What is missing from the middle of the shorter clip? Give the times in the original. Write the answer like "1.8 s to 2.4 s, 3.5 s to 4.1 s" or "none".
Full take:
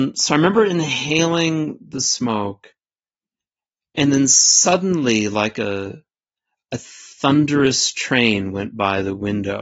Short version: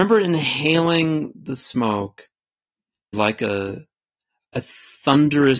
3.6 s to 5.3 s